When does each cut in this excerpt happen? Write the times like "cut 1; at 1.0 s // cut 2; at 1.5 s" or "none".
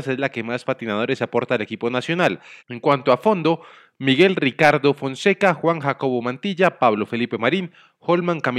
cut 1; at 2.6 s